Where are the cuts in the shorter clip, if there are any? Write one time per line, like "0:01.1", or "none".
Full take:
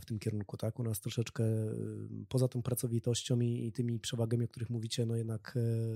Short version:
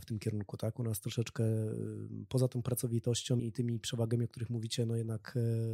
0:03.4